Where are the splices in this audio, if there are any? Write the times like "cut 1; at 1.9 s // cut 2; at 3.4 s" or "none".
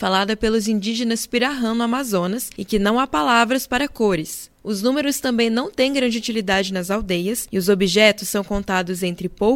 none